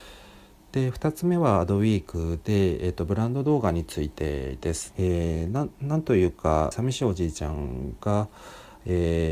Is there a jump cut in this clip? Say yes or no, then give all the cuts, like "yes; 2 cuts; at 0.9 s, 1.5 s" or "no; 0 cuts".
yes; 2 cuts; at 4.9 s, 6.7 s